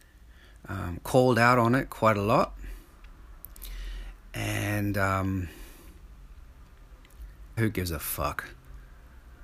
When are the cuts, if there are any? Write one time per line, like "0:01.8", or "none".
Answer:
0:07.6